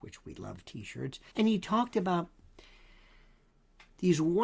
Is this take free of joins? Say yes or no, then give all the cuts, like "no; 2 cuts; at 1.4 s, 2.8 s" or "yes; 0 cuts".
no; 1 cut; at 1.3 s